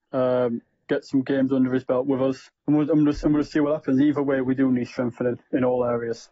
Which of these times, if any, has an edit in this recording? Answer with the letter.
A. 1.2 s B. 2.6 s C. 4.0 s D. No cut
B